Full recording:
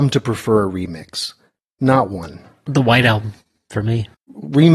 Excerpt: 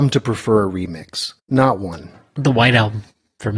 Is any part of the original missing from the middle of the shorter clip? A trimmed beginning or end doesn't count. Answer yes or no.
yes